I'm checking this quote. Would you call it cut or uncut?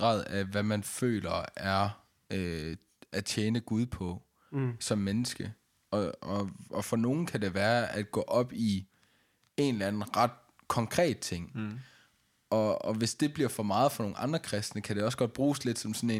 uncut